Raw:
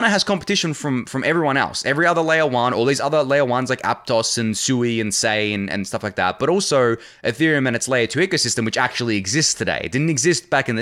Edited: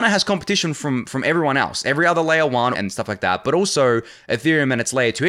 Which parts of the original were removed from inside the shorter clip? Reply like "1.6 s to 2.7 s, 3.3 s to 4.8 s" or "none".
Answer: 2.7 s to 5.7 s